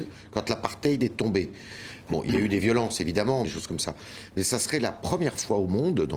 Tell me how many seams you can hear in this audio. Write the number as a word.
one